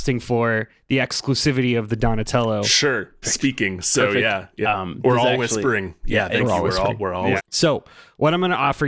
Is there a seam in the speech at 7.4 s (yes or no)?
yes